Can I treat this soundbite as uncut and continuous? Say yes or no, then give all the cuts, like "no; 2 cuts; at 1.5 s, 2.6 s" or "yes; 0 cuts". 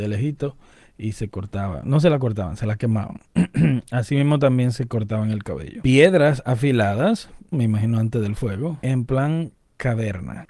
no; 2 cuts; at 7.5 s, 8.8 s